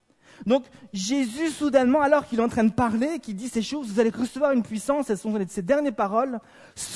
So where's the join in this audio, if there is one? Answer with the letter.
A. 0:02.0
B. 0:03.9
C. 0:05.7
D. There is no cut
D